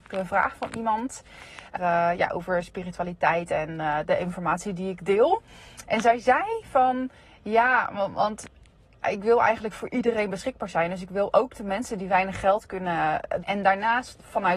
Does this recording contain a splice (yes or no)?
yes